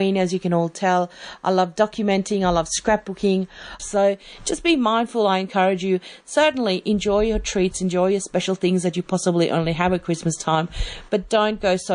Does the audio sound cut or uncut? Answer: cut